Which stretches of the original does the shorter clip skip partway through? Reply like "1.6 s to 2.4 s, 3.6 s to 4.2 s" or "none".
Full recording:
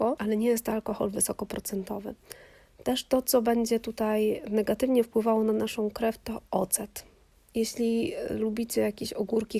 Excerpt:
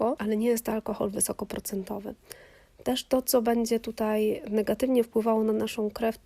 none

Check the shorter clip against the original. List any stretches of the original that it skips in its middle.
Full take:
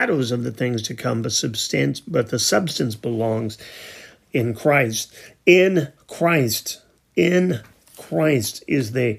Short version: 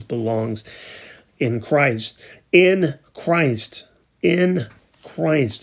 none

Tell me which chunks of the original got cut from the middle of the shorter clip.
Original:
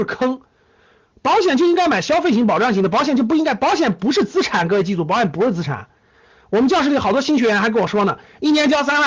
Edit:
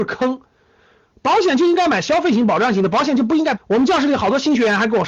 3.6 s to 6.4 s

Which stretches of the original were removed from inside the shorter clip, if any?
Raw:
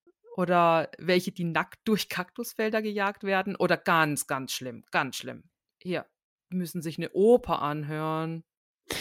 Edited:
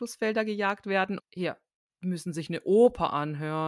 3.6 s to 5.7 s

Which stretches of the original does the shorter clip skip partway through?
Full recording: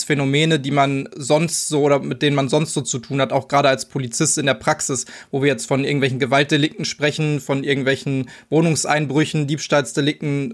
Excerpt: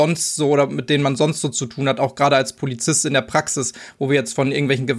none

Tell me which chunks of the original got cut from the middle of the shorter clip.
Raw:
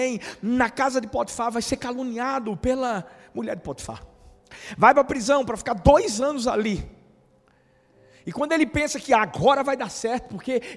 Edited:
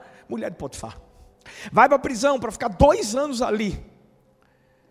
none

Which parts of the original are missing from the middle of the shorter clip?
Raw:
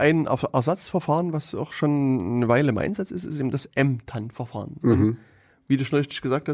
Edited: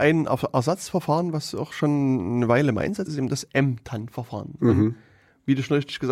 3.1 s to 3.3 s

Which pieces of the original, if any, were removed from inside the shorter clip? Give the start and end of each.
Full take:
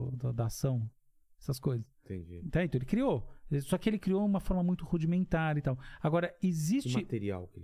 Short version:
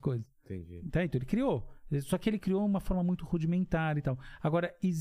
none

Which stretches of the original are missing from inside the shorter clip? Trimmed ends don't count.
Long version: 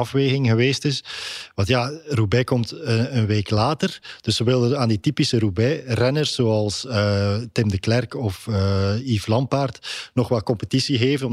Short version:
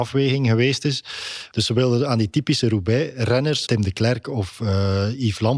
1.5 s to 4.2 s, 6.4 s to 7.5 s

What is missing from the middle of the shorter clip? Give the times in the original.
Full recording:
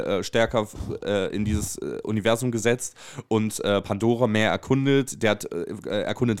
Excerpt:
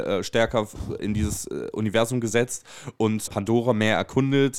1.0 s to 1.3 s, 3.6 s to 3.8 s

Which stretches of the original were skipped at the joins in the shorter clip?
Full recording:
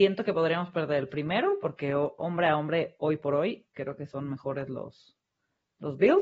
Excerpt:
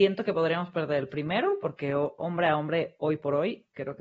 none

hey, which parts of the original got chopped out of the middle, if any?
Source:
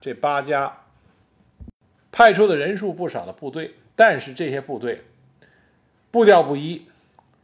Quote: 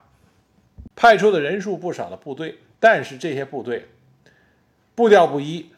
1.7 s to 2.1 s

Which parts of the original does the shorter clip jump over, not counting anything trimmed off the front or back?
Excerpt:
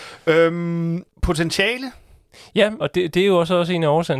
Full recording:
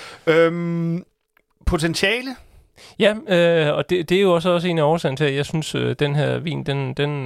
1.1 s to 1.5 s, 3.2 s to 3.8 s

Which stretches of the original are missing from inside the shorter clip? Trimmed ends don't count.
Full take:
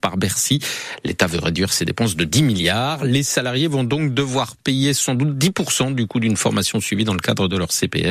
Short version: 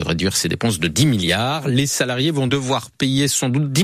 3.9 s to 4.1 s

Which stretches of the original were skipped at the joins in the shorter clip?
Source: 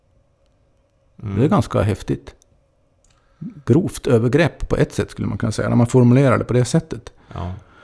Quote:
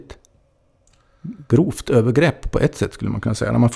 none

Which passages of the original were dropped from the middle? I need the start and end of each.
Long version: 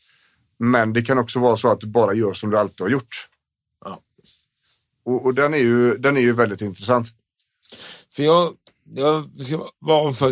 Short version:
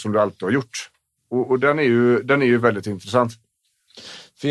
3.5 s to 4.9 s

